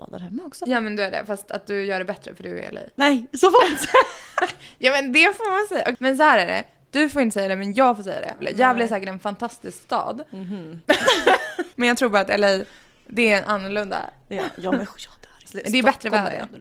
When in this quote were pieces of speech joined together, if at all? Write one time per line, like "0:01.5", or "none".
0:11.7
0:15.4